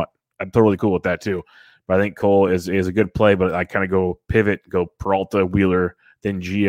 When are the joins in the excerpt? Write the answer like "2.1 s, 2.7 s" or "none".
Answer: none

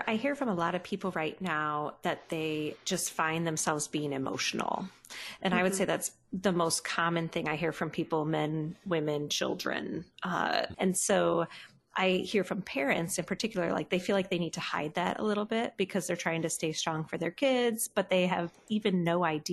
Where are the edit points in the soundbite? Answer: 10.7 s

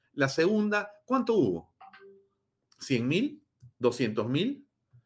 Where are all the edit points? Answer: 3.7 s

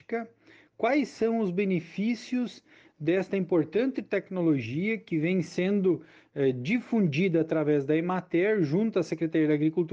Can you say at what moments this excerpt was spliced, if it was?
none

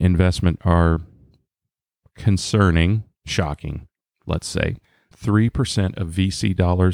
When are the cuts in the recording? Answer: 5.1 s

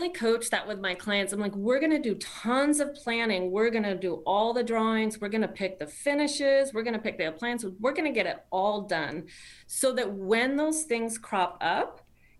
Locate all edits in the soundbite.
none

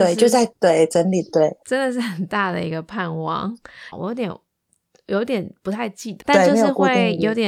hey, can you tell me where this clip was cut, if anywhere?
3.9 s, 6.2 s

